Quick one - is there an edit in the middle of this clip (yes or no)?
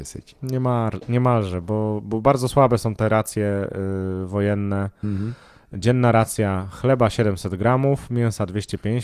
no